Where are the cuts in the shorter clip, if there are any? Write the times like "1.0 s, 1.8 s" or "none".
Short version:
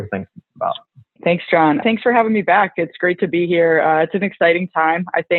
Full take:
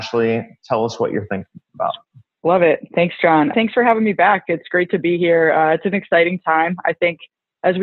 1.2 s